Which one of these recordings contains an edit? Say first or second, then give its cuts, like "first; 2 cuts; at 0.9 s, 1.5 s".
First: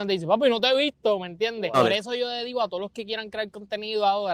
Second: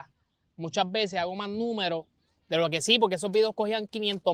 first; 1 cut; at 1.7 s